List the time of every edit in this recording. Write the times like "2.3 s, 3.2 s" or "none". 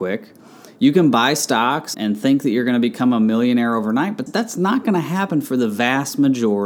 1.9 s, 4.3 s